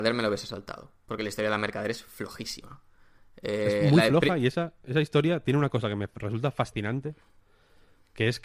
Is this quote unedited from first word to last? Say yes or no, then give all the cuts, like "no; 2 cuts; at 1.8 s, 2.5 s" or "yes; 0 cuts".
yes; 0 cuts